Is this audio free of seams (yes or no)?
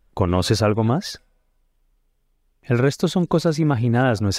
yes